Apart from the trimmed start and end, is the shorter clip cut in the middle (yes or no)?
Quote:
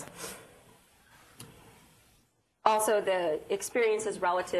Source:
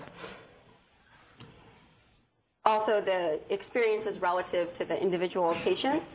no